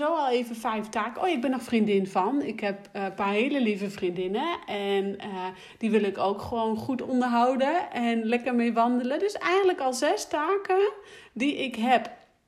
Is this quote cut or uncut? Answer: uncut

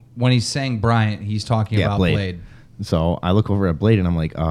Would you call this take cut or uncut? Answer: uncut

